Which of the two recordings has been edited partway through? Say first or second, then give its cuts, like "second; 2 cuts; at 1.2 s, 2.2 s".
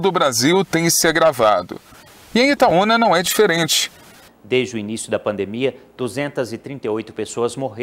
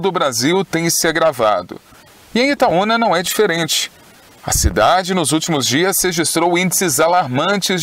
first; 1 cut; at 4.3 s